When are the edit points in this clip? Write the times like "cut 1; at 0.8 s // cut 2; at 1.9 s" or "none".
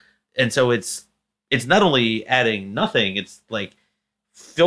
none